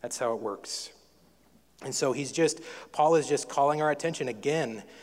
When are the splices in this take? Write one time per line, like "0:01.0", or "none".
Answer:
none

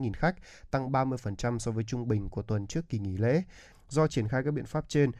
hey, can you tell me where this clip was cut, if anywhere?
0:03.7

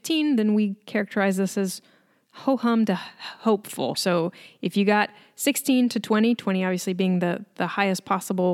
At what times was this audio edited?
0:03.9

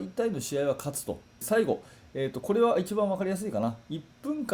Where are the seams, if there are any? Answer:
0:01.4

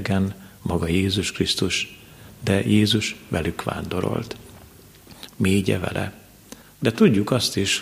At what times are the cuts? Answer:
0:05.3
0:06.6

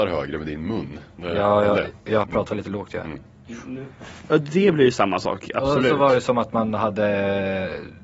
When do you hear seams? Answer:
0:02.2
0:04.3

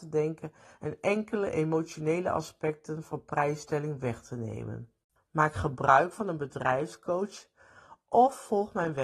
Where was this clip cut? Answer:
0:05.2

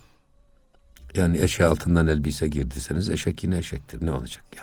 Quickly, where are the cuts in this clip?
none

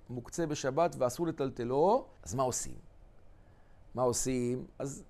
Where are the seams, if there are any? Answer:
0:02.2

